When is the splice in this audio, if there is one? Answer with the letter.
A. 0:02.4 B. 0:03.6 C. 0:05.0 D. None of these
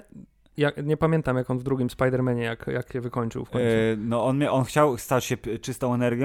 D